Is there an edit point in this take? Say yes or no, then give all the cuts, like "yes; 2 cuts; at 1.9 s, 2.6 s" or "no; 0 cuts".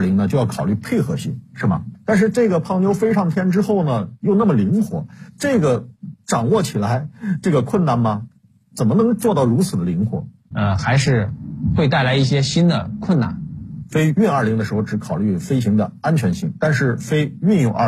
yes; 2 cuts; at 1.9 s, 10.5 s